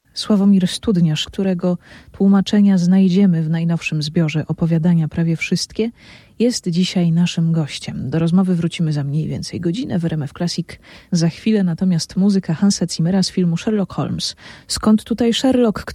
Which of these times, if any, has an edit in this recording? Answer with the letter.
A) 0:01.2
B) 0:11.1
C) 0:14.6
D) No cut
A